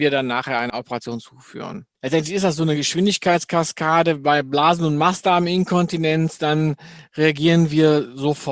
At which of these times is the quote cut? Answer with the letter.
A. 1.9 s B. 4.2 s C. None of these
A